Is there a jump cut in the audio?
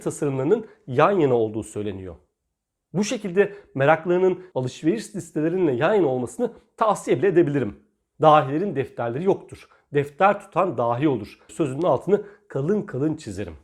yes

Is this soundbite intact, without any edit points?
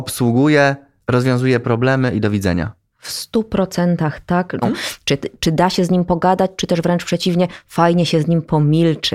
no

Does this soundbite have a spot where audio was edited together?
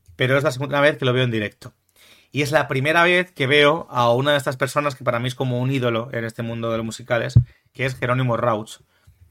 no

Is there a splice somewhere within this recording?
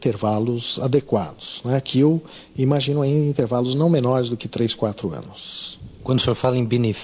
no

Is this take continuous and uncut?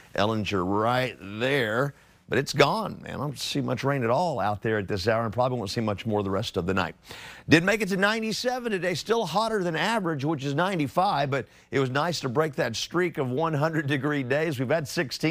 yes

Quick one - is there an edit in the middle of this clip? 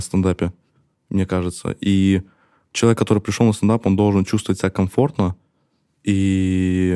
no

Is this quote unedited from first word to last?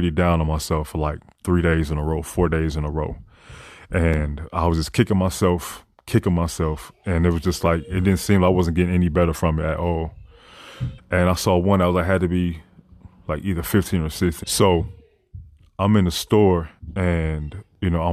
no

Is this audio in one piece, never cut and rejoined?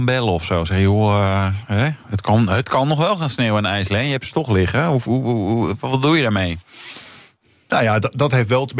yes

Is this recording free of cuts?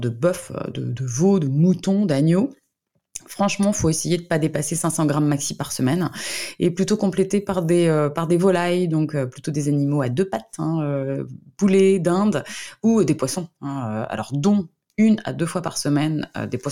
yes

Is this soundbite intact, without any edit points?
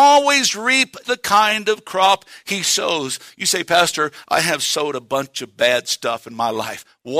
no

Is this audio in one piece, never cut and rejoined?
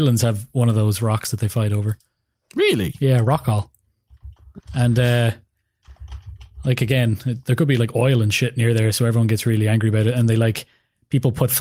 no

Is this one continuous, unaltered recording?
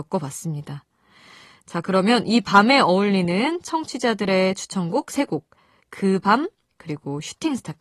no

